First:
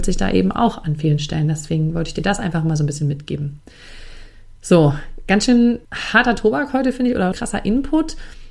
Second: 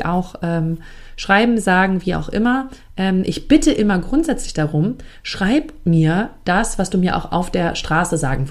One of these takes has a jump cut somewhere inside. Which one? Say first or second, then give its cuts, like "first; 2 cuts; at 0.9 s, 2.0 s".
first; 2 cuts; at 5.8 s, 7.3 s